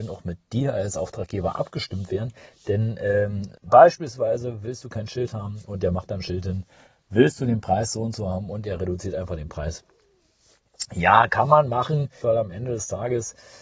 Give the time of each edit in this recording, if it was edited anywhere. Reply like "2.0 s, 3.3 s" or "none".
3.6 s, 12.2 s